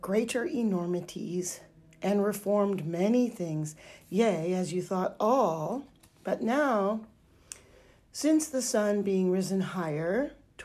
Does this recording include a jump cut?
no; 0 cuts

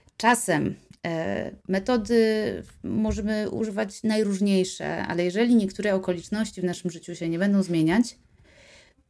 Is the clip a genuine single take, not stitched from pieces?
yes; 0 cuts

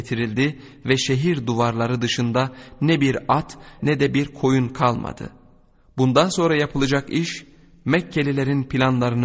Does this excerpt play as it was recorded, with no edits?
no; 1 cut; at 3.8 s

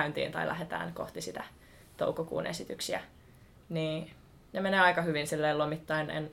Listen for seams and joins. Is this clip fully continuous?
yes; 0 cuts

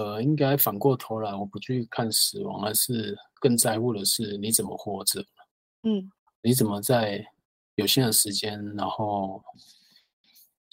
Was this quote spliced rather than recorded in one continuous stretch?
no; 0 cuts

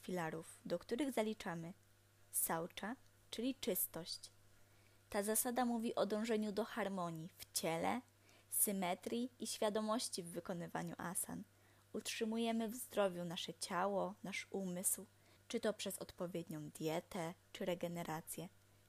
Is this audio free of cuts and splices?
no; 2 cuts; at 15.4 s, 17.4 s

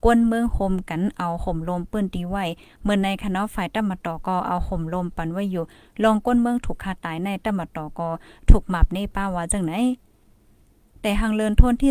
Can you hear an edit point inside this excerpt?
no; 0 cuts

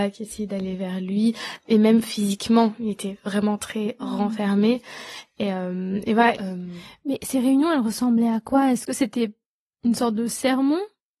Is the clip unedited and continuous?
no; 1 cut; at 6.3 s

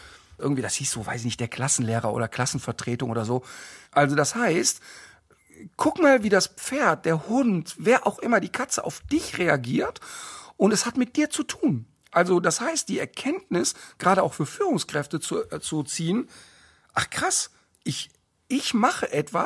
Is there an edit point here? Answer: yes; 1 cut; at 3.8 s

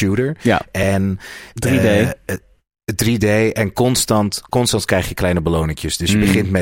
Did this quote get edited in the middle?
no; 0 cuts

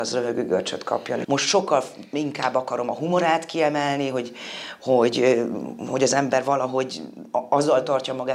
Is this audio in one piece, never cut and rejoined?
no; 1 cut; at 1.2 s

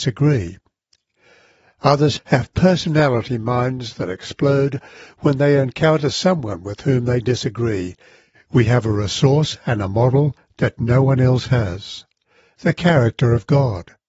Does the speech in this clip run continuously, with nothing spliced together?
no; 2 cuts; at 2.2 s, 8.3 s

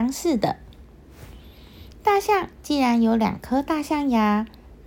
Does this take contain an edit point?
no; 0 cuts

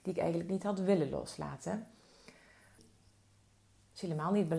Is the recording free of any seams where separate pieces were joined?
no; 1 cut; at 2.8 s

